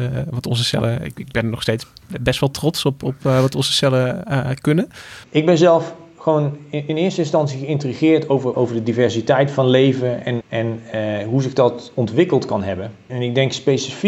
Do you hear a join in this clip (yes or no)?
yes